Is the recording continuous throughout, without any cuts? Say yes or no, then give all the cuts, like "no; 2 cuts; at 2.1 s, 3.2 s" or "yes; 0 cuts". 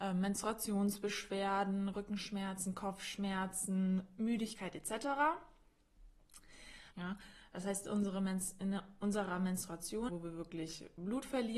no; 2 cuts; at 6.9 s, 10.1 s